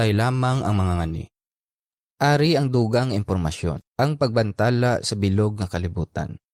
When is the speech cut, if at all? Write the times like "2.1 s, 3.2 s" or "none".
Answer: 2.0 s, 3.9 s

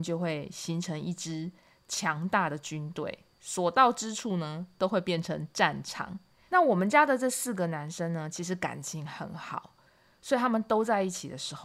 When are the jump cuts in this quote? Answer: 6.5 s

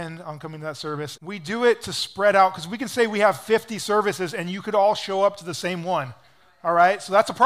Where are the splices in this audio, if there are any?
1.2 s

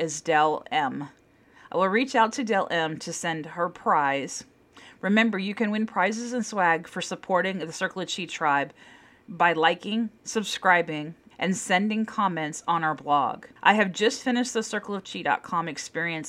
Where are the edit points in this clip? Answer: 11.3 s, 13.6 s

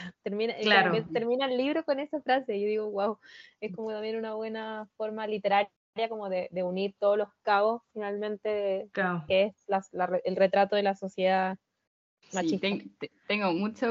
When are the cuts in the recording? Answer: 9.3 s

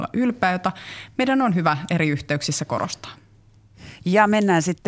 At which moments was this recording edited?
none

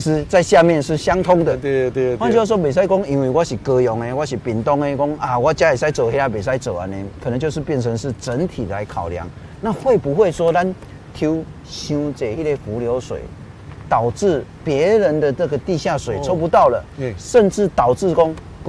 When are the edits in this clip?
none

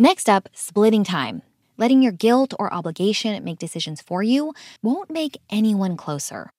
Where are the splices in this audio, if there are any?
1.6 s, 4.8 s

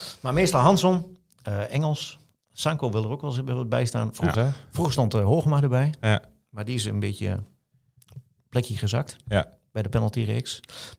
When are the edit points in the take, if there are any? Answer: 4.3 s

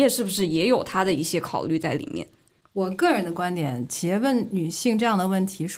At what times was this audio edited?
none

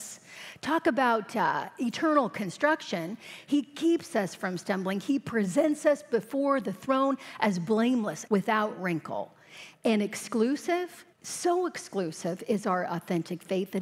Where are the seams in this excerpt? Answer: 8.3 s, 11.1 s

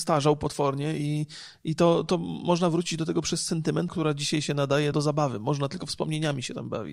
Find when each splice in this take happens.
3.9 s, 4.9 s

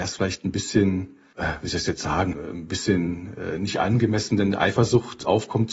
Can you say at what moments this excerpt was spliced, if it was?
2.3 s

